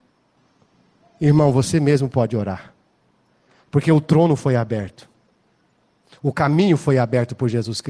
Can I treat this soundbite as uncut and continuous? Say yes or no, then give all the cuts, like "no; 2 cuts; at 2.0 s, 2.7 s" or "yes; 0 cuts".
yes; 0 cuts